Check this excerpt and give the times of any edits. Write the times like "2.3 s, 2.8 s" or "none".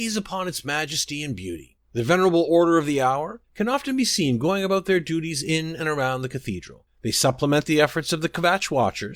3.4 s